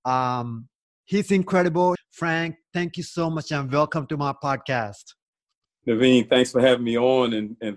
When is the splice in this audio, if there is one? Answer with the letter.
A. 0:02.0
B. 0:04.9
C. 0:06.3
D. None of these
A